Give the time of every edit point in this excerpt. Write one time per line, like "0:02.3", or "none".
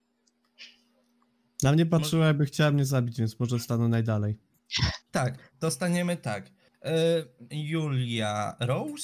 0:07.5